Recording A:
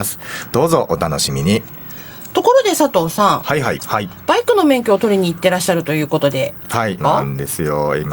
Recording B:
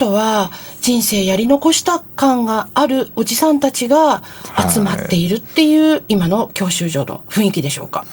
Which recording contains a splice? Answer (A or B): A